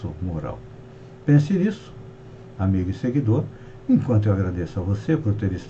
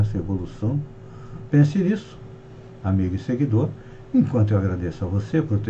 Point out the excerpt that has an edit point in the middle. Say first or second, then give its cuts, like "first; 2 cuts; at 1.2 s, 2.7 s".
second; 1 cut; at 1.5 s